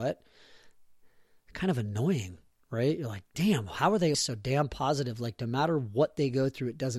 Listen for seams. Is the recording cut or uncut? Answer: cut